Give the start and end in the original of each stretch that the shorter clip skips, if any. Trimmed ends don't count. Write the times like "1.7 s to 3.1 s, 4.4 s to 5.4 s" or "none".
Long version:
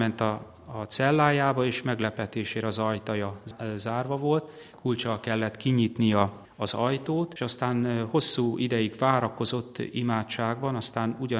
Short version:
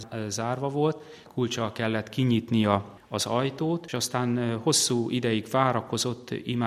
none